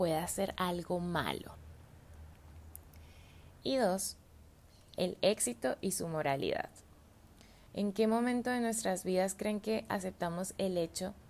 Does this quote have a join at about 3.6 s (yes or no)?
yes